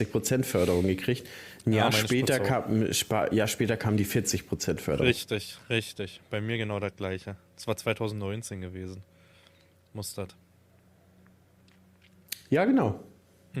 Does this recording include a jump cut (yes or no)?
no